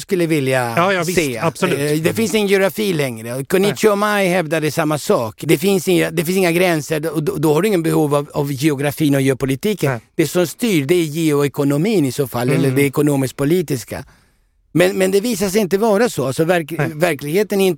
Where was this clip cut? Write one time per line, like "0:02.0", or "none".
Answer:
none